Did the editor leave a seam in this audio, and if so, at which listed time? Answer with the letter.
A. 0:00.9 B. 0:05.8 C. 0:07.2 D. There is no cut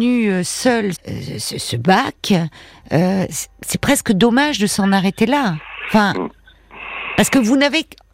A